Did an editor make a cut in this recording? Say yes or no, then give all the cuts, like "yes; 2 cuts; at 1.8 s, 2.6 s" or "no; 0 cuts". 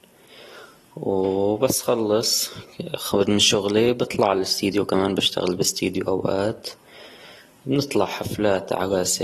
no; 0 cuts